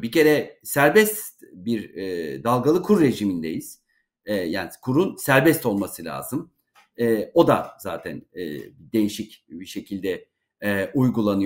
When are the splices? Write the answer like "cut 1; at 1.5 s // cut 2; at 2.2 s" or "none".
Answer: none